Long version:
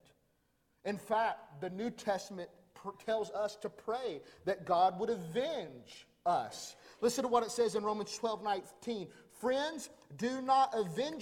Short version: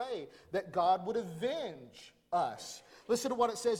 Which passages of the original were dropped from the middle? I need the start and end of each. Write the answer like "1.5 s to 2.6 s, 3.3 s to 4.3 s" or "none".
none

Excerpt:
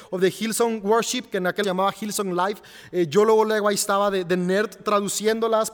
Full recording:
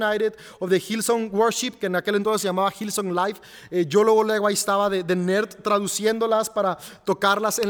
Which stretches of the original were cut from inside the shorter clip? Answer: 2.1 s to 2.4 s

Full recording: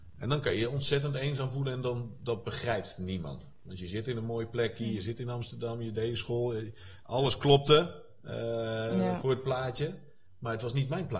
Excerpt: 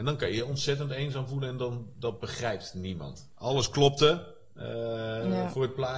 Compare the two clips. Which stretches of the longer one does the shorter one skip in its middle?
3.6 s to 7.0 s

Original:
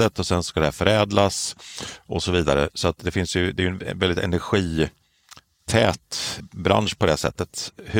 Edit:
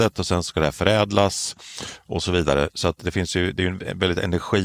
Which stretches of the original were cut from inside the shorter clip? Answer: none

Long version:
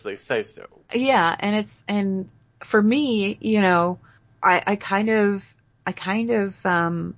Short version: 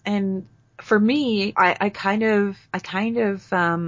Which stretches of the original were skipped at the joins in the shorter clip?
3.4 s to 4.4 s, 5.5 s to 5.8 s

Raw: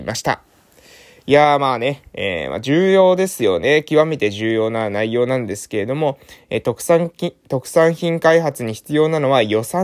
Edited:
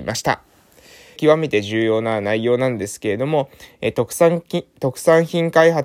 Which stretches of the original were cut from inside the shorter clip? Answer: 1.2 s to 3.8 s

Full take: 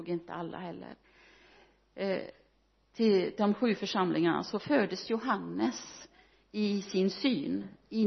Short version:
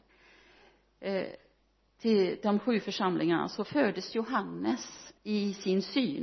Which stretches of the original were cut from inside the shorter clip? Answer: 6.1 s to 6.5 s

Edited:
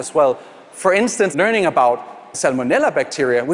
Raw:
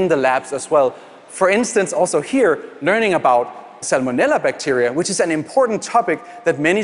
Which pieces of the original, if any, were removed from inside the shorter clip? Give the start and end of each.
1.9 s to 2.8 s

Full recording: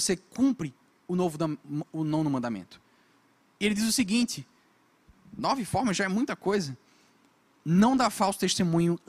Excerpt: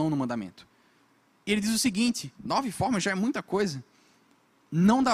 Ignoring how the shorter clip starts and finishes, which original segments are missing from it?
4.5 s to 5.3 s

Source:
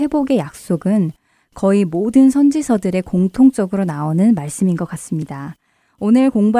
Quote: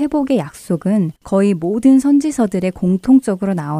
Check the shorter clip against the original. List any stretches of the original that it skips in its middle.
1.2 s to 1.5 s

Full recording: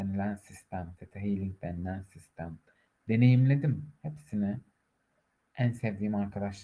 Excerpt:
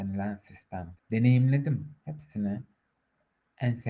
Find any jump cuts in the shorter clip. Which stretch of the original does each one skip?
1.0 s to 3.0 s

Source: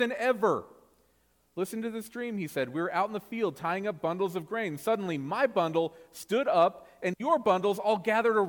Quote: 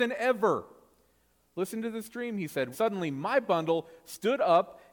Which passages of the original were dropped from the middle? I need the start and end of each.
2.7 s to 4.8 s

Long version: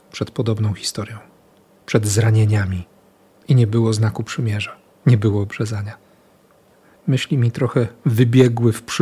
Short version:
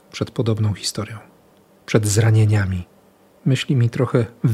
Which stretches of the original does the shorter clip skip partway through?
3.3 s to 7.0 s

